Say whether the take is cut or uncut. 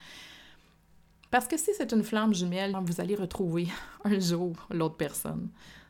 cut